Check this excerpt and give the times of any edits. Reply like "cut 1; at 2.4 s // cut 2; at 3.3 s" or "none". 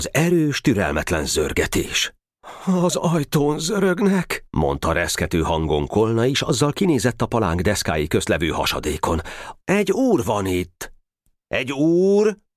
cut 1; at 9.6 s